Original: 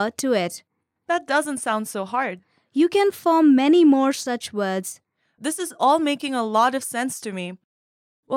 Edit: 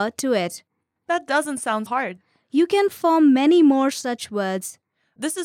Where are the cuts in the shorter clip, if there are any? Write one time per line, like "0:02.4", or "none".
0:01.9